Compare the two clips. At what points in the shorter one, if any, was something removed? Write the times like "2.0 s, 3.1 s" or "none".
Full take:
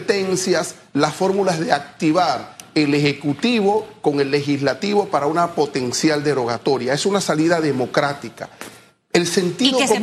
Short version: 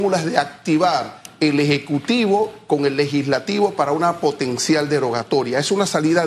none